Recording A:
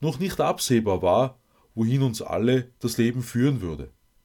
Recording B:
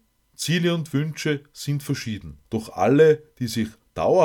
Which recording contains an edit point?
B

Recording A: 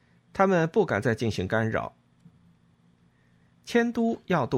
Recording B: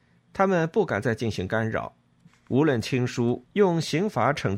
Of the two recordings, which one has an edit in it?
B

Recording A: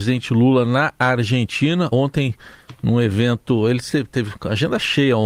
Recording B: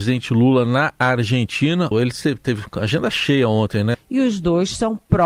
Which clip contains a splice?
B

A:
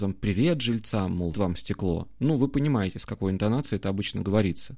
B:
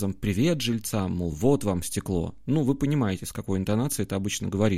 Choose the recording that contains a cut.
A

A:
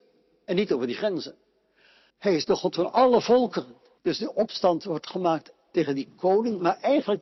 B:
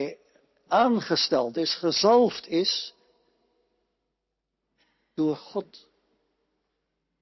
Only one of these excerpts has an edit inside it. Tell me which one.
A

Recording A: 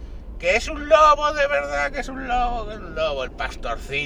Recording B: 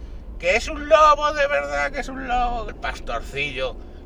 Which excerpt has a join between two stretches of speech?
B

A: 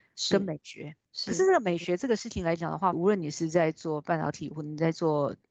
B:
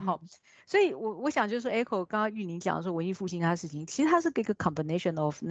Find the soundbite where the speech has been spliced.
A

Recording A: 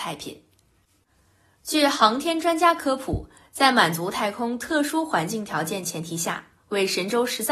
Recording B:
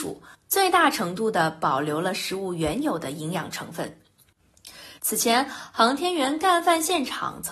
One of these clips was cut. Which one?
B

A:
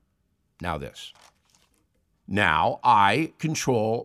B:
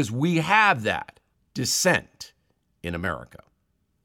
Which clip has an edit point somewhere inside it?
A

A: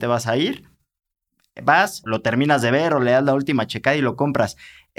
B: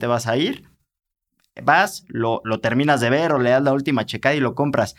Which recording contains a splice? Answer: A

